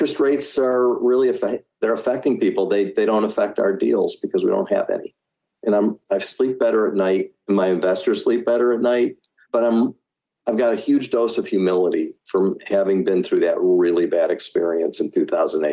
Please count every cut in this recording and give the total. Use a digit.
0